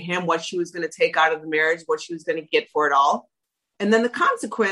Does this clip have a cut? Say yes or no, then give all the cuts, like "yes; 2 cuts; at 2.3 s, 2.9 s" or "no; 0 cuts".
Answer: yes; 1 cut; at 3.7 s